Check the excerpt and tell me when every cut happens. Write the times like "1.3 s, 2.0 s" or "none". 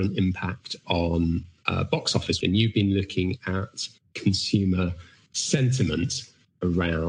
2.4 s